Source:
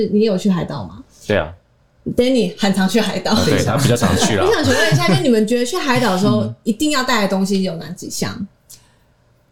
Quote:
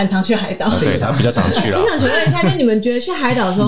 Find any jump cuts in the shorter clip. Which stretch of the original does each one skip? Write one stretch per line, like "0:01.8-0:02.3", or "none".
none